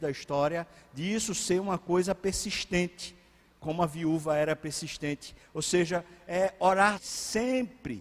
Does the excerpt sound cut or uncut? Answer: cut